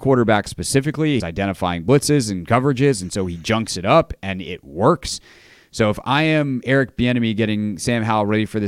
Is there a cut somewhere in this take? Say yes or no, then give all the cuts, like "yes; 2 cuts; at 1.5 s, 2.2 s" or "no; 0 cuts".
yes; 1 cut; at 1.2 s